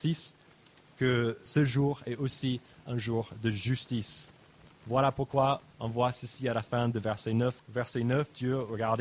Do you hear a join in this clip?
yes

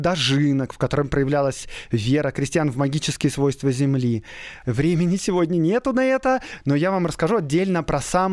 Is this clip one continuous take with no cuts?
no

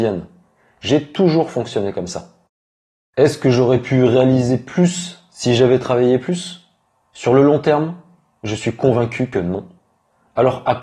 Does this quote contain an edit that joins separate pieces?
no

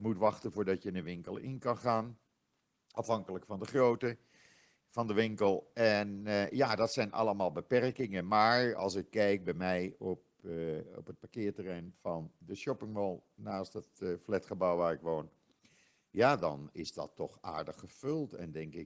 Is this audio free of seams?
yes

